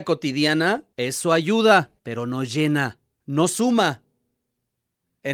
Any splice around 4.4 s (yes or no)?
no